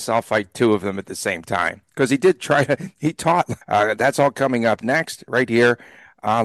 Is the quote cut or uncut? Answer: cut